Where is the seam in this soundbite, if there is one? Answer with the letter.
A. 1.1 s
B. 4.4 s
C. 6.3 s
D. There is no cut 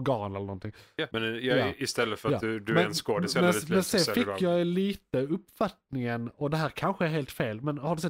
A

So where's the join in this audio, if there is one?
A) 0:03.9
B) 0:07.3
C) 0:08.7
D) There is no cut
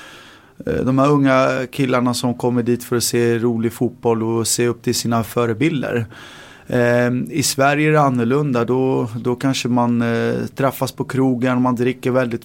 D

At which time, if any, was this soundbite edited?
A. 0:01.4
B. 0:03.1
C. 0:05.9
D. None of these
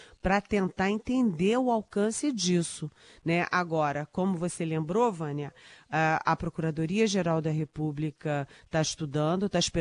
D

